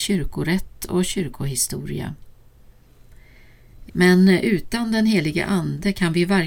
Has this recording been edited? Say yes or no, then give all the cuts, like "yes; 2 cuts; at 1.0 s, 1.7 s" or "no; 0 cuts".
yes; 1 cut; at 3.9 s